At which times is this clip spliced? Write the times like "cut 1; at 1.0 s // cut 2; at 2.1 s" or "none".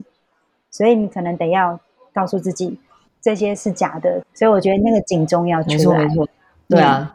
cut 1; at 4.2 s